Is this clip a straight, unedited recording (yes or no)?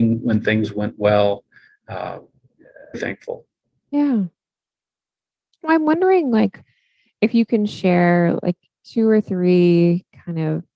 no